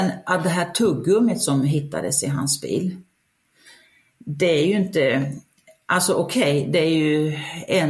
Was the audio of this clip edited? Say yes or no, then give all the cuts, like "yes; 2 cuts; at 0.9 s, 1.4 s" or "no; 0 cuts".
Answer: no; 0 cuts